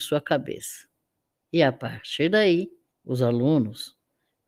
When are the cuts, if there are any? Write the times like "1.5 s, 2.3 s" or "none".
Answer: 2.9 s